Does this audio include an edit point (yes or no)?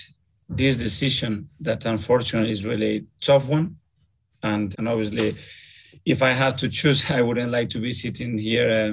yes